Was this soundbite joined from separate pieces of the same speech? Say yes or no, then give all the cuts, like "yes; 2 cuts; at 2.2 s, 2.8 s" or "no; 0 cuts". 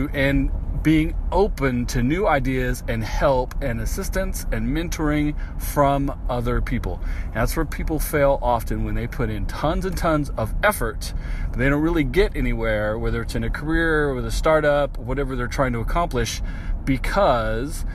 no; 0 cuts